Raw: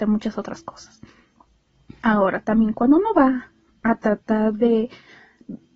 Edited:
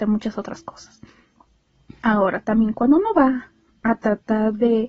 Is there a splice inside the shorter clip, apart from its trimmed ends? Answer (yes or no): no